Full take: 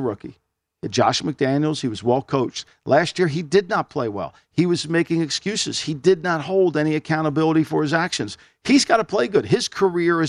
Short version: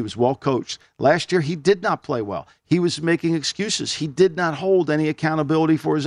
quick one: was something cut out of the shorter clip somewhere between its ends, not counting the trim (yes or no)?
no